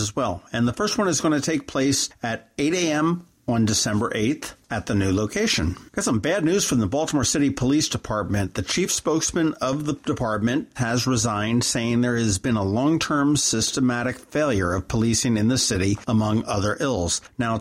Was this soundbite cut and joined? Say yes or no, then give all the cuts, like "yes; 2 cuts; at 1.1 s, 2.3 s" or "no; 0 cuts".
yes; 2 cuts; at 5.9 s, 10.8 s